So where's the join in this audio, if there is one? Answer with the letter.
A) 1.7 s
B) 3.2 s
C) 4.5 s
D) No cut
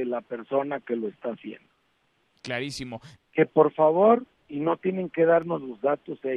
B